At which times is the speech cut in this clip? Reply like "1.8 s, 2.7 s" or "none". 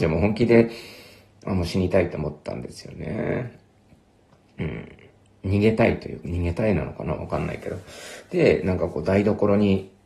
none